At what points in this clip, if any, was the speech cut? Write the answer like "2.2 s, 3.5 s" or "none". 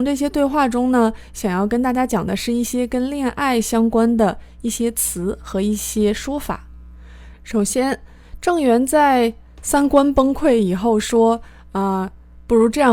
none